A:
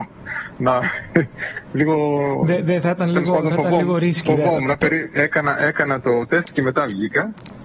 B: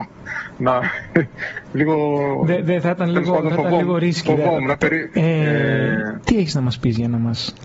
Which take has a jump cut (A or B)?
B